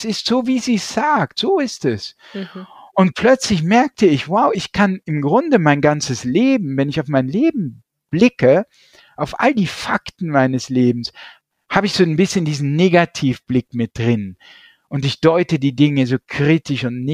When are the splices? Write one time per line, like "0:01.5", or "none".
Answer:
none